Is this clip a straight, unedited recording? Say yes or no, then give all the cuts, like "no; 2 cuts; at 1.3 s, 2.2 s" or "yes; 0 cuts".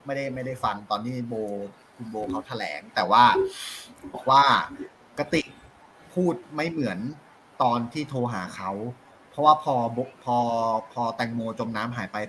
no; 1 cut; at 4.1 s